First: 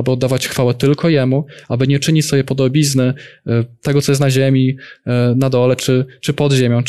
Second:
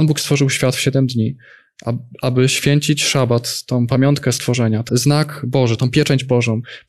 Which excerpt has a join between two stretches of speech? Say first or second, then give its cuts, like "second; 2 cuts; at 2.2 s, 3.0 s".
second; 1 cut; at 4.9 s